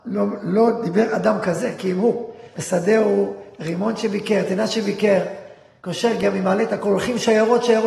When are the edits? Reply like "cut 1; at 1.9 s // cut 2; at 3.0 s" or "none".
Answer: cut 1; at 2.5 s